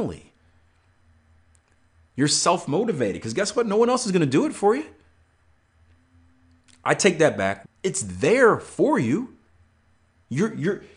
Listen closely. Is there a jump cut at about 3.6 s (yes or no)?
no